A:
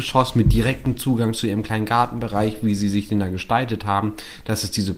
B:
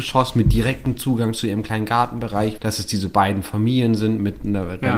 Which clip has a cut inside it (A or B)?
B